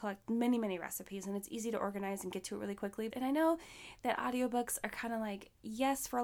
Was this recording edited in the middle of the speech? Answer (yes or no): yes